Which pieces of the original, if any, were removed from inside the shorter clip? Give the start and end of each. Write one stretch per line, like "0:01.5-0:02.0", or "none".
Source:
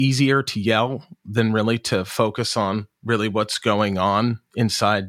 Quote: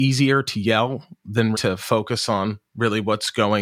0:01.5-0:01.8

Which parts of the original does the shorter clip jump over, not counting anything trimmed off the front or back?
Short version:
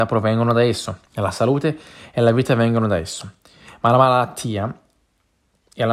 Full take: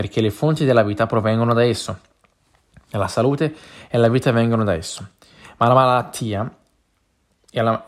0:02.1-0:02.8

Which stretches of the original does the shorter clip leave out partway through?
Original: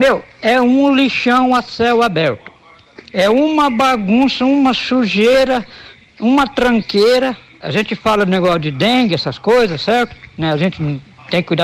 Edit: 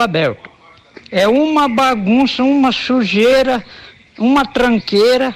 none

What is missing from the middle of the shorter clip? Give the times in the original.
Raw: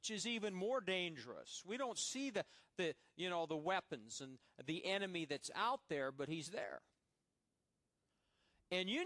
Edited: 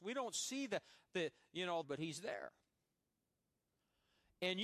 0:03.5-0:06.1

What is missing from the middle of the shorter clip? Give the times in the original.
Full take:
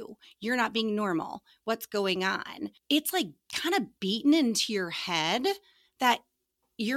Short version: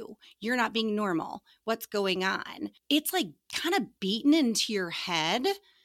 none

